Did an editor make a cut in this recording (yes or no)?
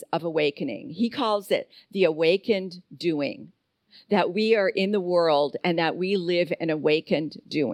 no